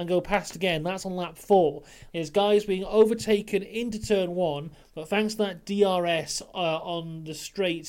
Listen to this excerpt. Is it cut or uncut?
cut